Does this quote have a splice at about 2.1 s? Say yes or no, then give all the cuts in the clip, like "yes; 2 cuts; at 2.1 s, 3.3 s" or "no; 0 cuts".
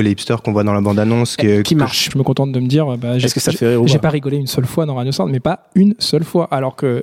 yes; 1 cut; at 2.1 s